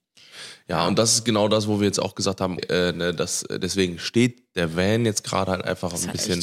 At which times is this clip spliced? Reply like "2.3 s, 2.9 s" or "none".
2.6 s